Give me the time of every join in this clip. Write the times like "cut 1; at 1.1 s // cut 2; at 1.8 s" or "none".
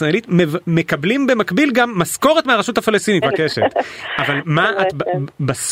cut 1; at 3.2 s